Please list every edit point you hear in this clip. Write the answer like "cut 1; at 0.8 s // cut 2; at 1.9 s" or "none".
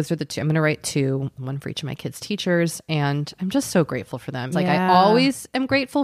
cut 1; at 1.4 s // cut 2; at 4.5 s